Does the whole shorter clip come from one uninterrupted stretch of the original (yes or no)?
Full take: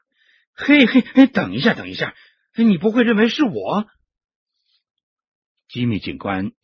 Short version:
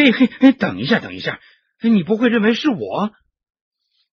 yes